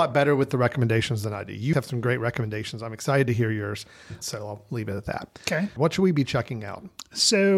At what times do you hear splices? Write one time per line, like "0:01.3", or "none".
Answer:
0:01.7
0:04.2
0:05.8